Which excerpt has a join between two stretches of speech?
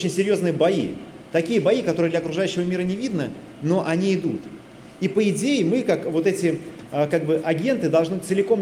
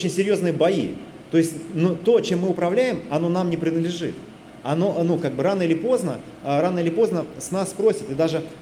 second; 1 cut; at 1.3 s

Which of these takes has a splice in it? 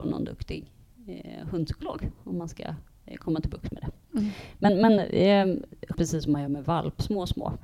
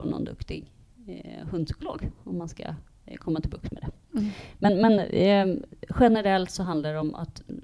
first; 1 cut; at 5.9 s

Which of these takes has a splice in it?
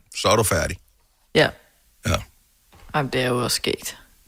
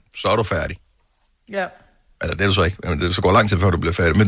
first; 1 cut; at 1.3 s

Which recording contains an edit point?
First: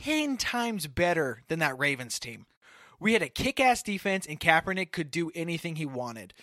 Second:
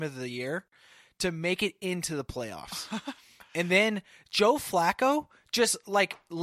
first; 1 cut; at 4.3 s

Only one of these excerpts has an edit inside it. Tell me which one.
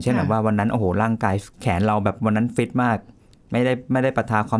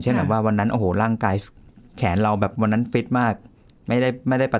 first; 1 cut; at 1.5 s

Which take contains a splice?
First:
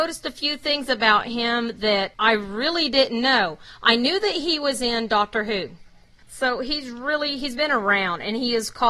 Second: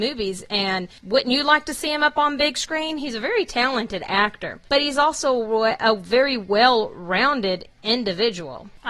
first; 1 cut; at 6.2 s

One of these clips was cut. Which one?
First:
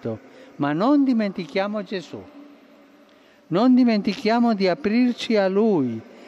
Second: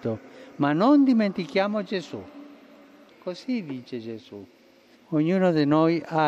second; 2 cuts; at 3.1 s, 4.9 s

